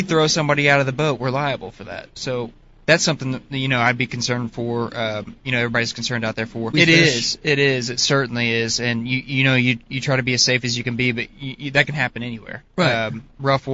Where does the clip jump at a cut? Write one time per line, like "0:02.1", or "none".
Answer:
0:06.7